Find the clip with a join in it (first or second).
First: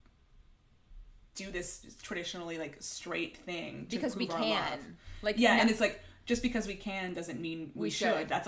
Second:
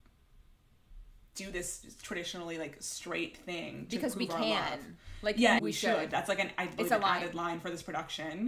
second